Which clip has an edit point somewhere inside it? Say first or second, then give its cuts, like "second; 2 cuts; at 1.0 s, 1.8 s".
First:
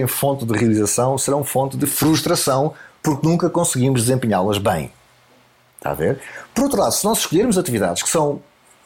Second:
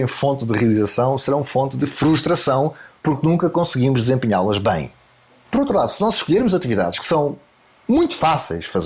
second; 1 cut; at 5.4 s